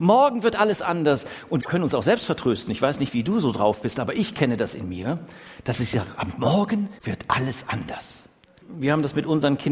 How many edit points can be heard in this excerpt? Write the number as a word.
one